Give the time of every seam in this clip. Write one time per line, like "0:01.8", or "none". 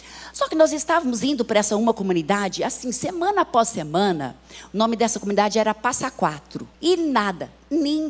0:06.7